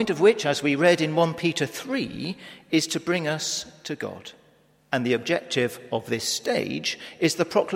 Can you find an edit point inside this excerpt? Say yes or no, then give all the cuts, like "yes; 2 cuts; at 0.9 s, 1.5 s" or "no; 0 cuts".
yes; 1 cut; at 4.8 s